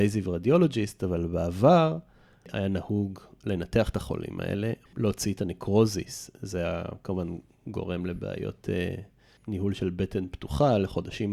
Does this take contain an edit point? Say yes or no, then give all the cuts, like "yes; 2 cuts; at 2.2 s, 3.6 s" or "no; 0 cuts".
yes; 2 cuts; at 4.9 s, 9.4 s